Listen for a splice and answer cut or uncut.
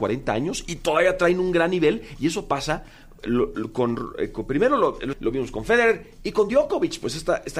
cut